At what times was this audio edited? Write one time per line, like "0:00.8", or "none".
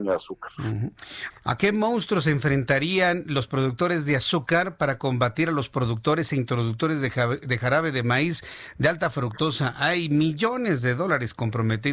0:01.3